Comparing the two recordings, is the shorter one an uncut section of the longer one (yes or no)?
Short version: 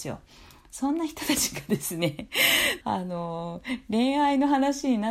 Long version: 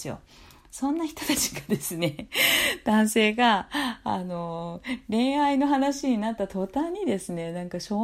no